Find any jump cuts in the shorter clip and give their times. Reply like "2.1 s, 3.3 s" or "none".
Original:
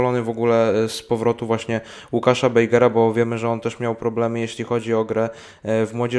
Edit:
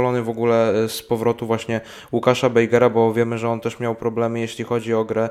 none